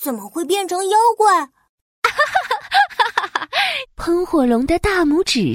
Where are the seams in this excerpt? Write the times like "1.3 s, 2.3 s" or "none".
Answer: 3.9 s